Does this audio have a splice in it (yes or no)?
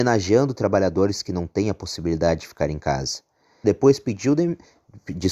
yes